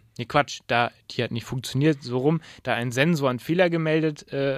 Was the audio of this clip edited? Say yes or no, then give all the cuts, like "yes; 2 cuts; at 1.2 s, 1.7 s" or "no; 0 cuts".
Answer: no; 0 cuts